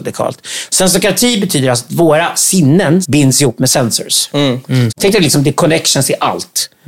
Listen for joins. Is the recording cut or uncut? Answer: cut